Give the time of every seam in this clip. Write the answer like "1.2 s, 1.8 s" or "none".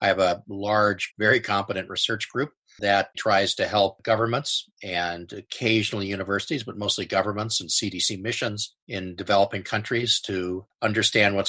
1.1 s, 3.1 s

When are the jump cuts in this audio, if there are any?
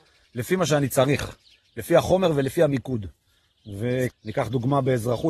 4.1 s

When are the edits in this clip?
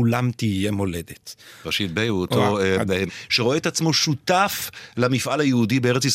1.6 s, 3.1 s

